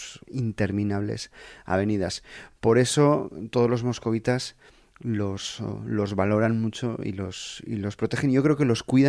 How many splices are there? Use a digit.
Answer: 0